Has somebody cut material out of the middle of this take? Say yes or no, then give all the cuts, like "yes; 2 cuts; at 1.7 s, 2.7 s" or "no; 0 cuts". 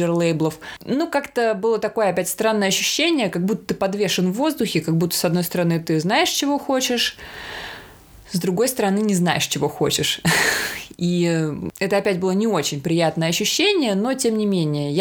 no; 0 cuts